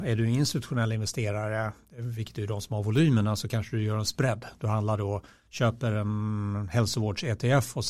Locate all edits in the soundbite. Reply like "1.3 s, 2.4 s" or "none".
none

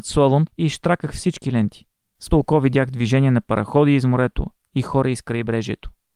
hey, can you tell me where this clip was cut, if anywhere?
2.3 s

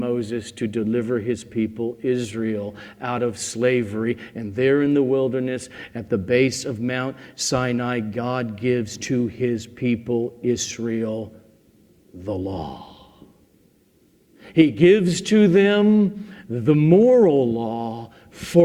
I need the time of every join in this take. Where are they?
none

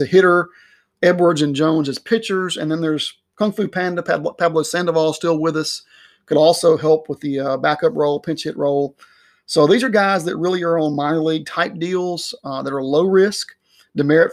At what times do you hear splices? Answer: none

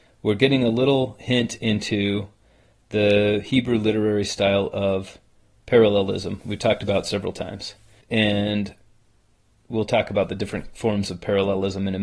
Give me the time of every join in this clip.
8.0 s

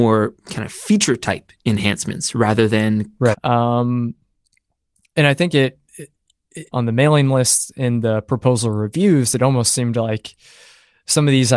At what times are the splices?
3.3 s, 6.7 s

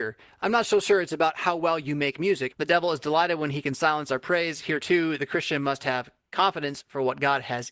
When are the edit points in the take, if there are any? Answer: 2.5 s

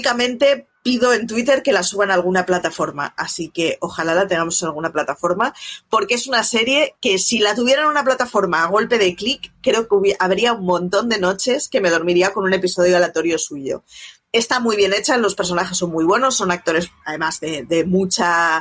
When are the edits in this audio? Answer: none

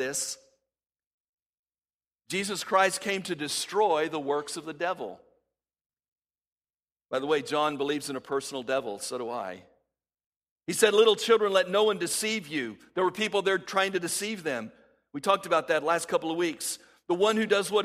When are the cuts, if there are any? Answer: none

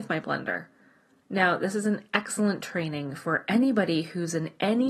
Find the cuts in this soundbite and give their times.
1.2 s

